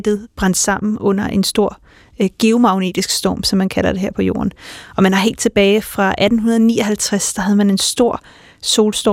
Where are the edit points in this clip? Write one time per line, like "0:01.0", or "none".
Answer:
none